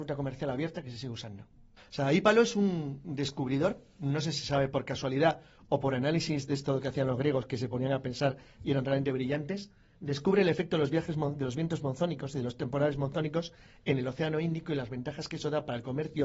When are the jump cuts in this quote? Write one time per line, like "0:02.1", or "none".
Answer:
0:01.8